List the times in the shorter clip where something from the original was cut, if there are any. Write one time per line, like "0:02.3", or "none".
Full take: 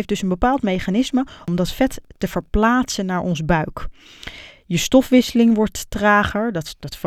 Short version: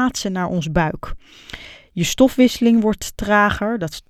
none